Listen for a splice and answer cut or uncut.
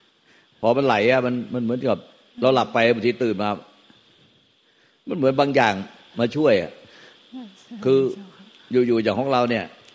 uncut